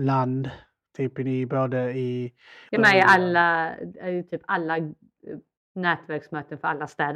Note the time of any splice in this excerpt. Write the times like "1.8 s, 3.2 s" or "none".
2.7 s